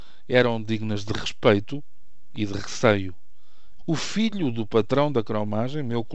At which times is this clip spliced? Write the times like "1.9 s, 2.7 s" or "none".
3.8 s